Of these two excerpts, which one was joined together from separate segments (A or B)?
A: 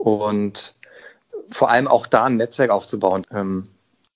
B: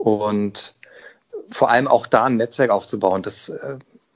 A